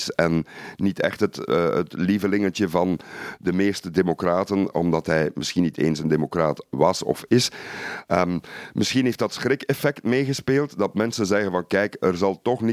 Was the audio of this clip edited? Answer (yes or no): no